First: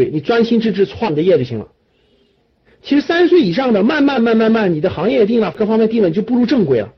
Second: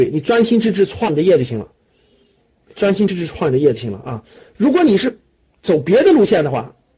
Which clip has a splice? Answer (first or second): first